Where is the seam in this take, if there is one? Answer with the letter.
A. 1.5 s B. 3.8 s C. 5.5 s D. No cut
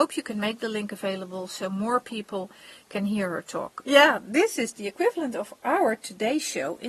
B